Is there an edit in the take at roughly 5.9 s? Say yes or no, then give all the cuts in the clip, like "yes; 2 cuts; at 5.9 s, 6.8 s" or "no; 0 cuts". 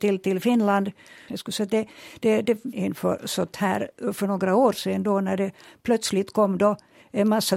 no; 2 cuts; at 1.3 s, 2.7 s